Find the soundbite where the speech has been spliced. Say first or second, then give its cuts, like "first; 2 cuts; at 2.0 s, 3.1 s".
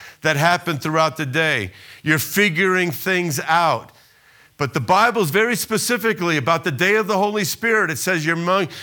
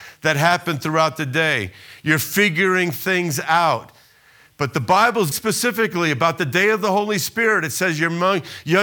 second; 1 cut; at 5.3 s